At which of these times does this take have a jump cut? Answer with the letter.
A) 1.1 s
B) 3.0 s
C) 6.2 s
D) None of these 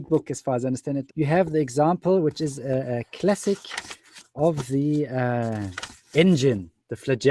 A